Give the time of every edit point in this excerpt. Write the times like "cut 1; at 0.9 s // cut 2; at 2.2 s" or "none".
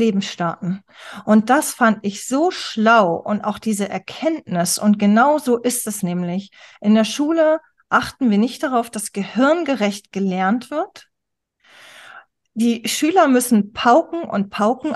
none